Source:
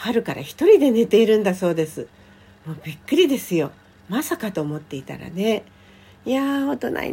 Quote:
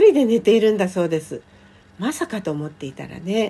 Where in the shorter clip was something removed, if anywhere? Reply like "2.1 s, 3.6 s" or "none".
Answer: 1.8 s